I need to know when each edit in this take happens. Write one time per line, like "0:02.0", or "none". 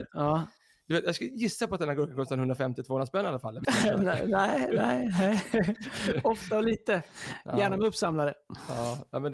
0:03.6